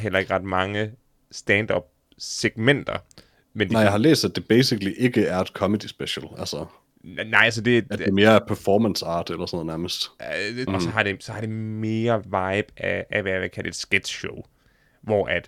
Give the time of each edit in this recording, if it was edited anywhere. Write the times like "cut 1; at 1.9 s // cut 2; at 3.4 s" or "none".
cut 1; at 10.7 s